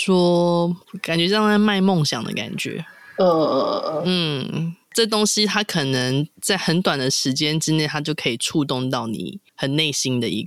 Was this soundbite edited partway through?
yes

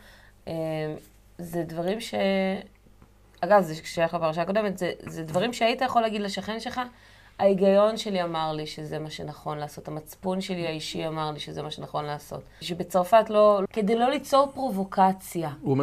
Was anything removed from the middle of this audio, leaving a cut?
yes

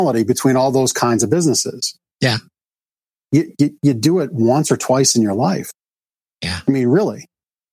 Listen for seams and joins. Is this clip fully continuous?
yes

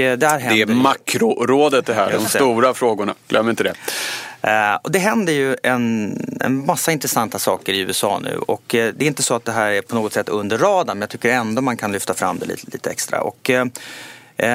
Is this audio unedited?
yes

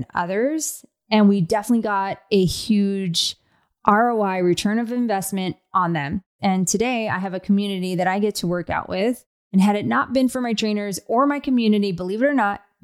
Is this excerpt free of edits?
no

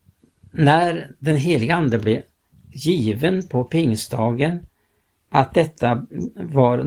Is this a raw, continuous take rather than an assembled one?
yes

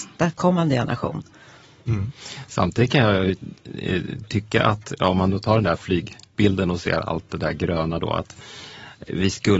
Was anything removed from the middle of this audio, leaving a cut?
no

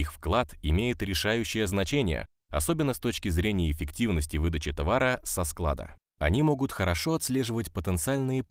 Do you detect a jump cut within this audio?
no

